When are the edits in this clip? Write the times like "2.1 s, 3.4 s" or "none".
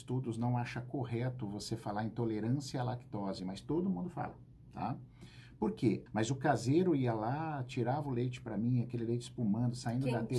6.1 s